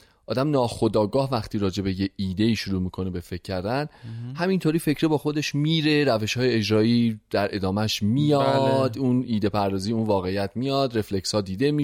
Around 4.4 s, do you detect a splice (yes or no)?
no